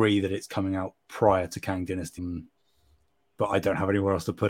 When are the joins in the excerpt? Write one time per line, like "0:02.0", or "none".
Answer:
0:02.2